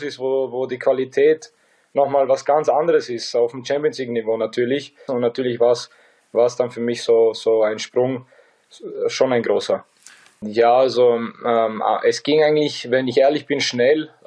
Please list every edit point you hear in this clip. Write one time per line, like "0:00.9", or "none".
0:05.1
0:10.4

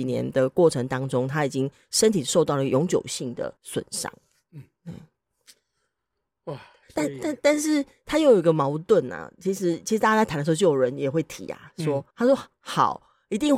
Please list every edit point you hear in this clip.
0:03.6
0:12.1

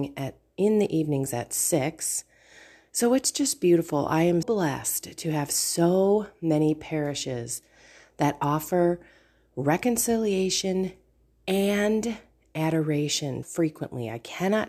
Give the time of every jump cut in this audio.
0:04.4
0:13.4

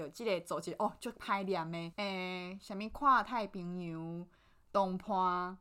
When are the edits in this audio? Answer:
0:01.9

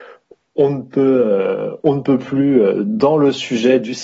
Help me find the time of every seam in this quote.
none

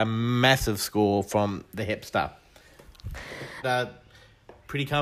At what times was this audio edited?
0:03.6

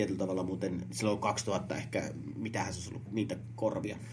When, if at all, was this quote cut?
0:03.1

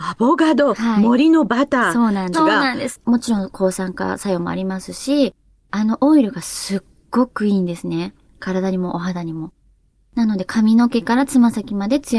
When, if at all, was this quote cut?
0:02.3

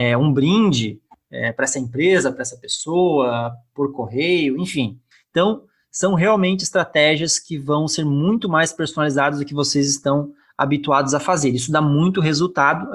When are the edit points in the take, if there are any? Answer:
none

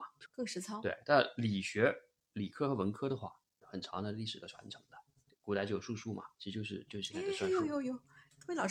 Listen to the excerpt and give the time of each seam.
none

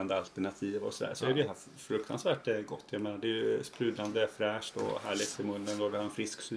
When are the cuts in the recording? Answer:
none

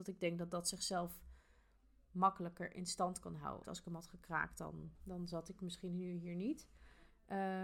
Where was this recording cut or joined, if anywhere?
0:03.6
0:04.9

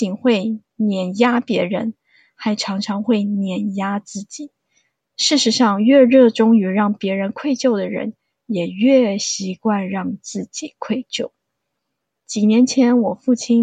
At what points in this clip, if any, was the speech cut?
none

